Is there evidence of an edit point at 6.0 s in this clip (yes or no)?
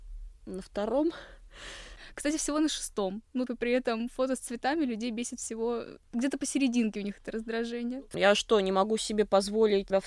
yes